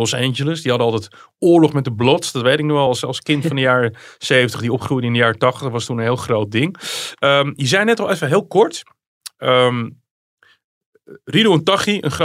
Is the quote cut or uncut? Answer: uncut